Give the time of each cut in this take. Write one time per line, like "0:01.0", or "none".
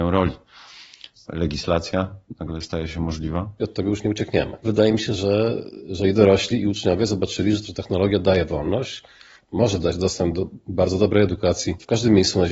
0:01.1